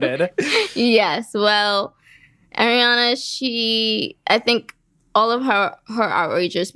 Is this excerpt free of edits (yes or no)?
yes